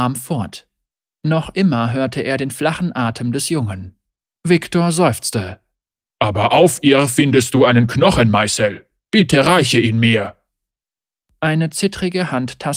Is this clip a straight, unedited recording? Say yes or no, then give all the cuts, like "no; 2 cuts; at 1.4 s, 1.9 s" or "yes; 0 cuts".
no; 1 cut; at 4.4 s